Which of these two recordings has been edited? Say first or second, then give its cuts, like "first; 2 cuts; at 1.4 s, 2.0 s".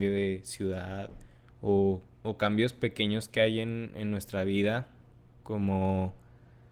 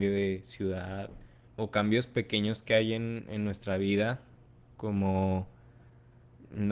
second; 1 cut; at 1.5 s